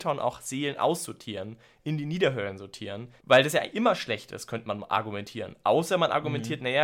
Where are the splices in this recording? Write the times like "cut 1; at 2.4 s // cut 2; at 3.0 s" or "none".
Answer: cut 1; at 3.2 s